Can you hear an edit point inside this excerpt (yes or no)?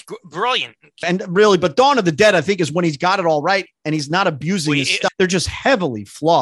yes